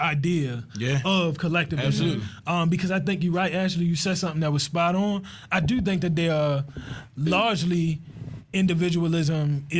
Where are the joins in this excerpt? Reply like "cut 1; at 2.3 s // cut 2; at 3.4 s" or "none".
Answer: none

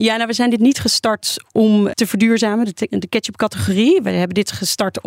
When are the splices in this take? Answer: cut 1; at 1.9 s

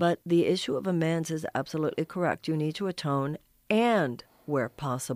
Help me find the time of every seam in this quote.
none

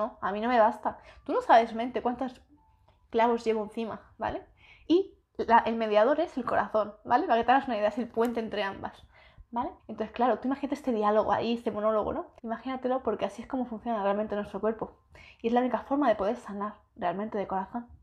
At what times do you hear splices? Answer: cut 1; at 4.9 s // cut 2; at 9.8 s // cut 3; at 12.4 s

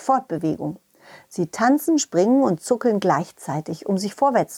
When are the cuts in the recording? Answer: none

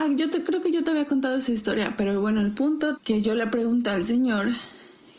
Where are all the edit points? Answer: cut 1; at 3.0 s

